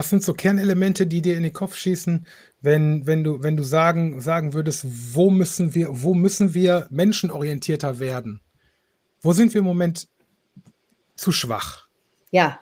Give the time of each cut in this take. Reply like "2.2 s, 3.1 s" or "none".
none